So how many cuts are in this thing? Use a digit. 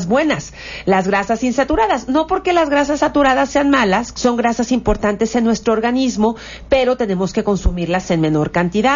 1